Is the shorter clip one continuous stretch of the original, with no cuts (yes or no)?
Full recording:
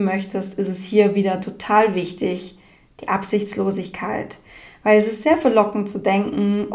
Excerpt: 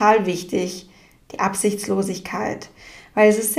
yes